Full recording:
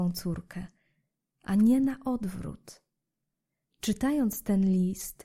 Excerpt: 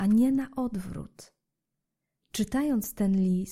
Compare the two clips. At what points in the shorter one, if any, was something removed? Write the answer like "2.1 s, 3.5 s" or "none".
none